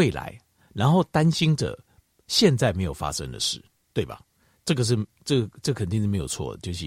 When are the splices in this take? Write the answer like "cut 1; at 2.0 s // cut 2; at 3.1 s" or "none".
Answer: none